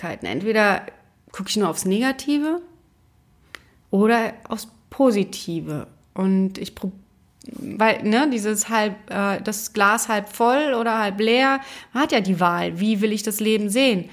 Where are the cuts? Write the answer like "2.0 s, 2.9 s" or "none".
none